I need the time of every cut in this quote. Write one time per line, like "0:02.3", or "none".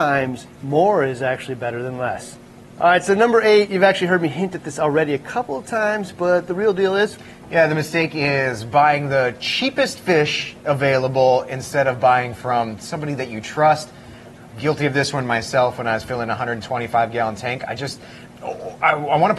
0:18.3